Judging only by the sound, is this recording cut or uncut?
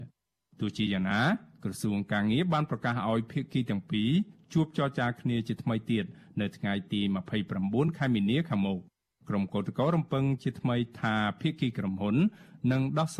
uncut